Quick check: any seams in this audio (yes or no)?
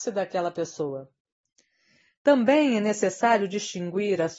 no